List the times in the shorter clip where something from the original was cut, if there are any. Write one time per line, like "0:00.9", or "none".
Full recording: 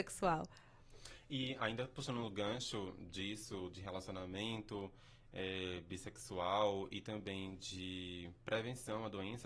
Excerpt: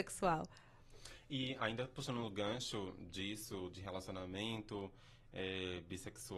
none